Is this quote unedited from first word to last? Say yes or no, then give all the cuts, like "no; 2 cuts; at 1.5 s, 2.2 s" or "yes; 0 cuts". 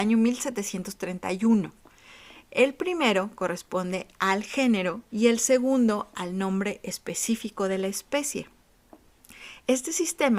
no; 2 cuts; at 2.5 s, 5.1 s